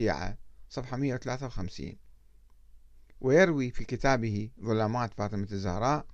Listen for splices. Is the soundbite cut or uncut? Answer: uncut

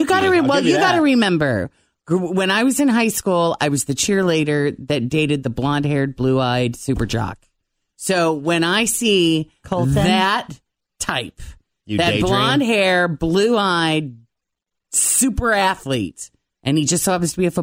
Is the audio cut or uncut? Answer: uncut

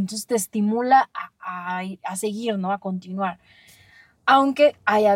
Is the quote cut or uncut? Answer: uncut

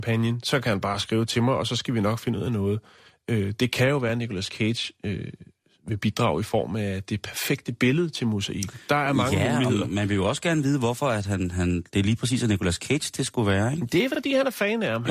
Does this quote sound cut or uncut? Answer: uncut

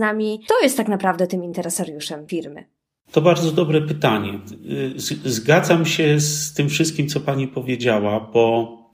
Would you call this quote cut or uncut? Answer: uncut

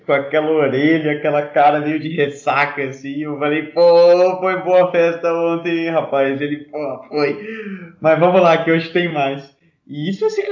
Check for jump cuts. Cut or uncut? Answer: uncut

